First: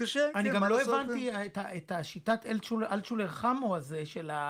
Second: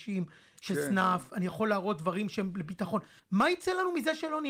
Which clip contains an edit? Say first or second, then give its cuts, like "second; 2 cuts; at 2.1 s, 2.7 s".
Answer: second; 1 cut; at 3.2 s